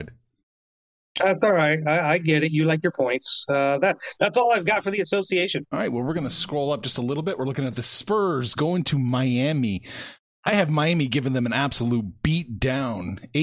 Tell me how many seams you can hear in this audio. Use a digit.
0